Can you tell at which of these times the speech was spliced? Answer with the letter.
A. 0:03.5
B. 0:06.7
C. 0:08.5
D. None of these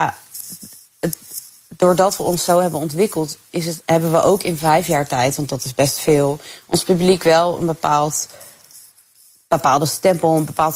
D